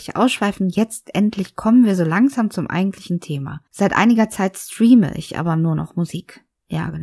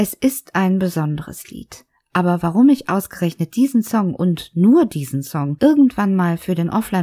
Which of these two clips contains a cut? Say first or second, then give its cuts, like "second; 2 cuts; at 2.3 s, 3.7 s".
first; 1 cut; at 3.7 s